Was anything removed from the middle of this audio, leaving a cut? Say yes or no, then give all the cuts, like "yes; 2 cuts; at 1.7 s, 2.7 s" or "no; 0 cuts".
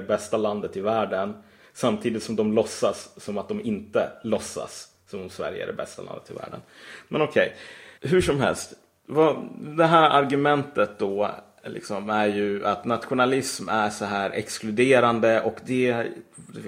yes; 1 cut; at 8.0 s